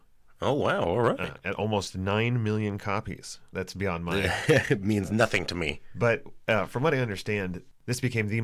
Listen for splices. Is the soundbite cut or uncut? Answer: cut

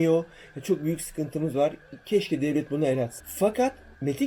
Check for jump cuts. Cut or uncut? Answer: cut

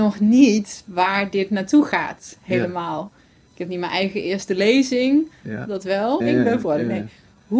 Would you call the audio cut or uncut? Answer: cut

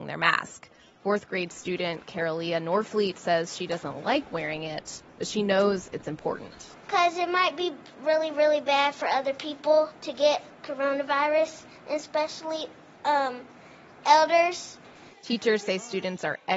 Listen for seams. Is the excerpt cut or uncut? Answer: cut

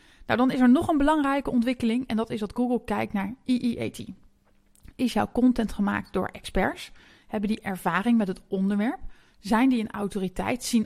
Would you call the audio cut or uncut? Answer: uncut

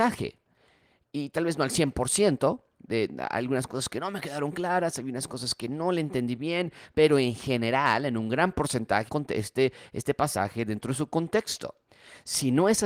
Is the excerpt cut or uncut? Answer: cut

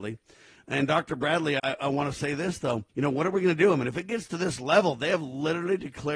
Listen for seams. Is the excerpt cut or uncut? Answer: cut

